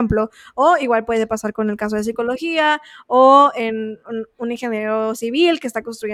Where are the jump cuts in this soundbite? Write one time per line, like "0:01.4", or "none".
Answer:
none